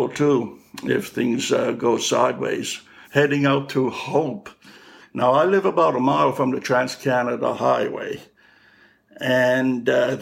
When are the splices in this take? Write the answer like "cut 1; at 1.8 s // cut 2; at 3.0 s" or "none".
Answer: cut 1; at 3.0 s // cut 2; at 5.0 s